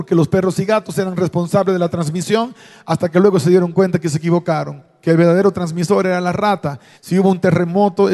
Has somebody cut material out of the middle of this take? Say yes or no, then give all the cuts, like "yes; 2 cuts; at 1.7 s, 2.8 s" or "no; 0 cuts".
yes; 1 cut; at 7.0 s